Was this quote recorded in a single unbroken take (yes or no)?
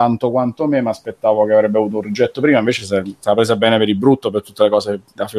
yes